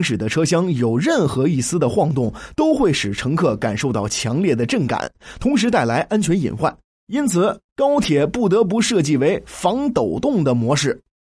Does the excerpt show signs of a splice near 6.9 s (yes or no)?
no